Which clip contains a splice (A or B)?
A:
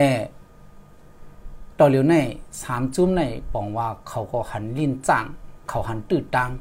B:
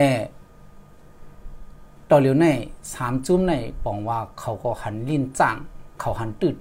A